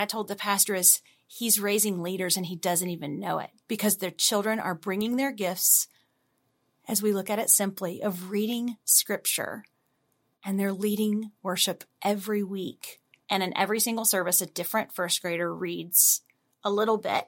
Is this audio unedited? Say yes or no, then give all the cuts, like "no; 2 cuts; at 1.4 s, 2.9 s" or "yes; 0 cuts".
no; 1 cut; at 13.2 s